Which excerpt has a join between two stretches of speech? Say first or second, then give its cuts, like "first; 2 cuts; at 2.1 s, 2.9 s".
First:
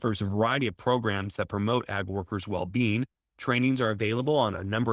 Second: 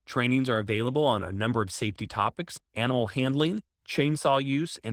second; 1 cut; at 2.6 s